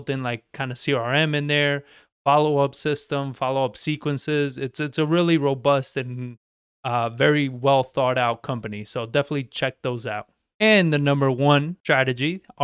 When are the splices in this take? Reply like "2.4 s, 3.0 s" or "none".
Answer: none